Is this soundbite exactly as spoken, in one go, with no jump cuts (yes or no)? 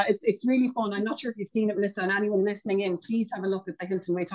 yes